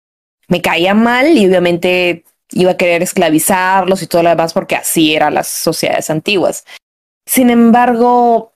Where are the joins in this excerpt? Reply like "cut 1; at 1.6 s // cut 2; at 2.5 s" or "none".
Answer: none